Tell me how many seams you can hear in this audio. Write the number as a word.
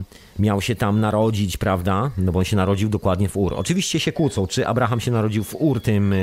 zero